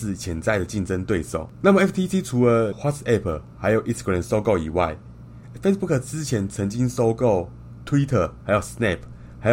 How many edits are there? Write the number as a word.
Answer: zero